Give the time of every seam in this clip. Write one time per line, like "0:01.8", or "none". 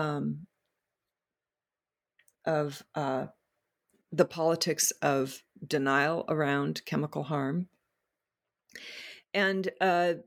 none